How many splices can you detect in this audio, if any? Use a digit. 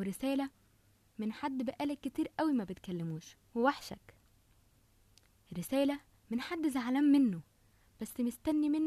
1